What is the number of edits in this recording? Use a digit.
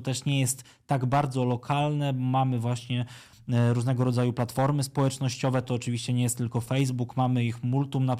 0